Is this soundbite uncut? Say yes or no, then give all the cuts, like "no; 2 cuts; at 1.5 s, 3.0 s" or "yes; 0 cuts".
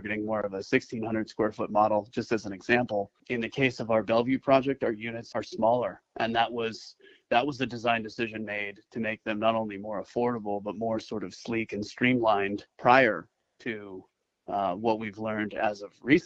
no; 1 cut; at 5.3 s